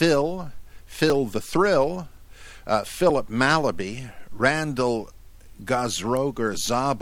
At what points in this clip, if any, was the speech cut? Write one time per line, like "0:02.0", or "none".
none